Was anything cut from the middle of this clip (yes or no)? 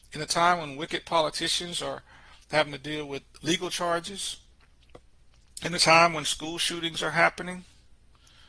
yes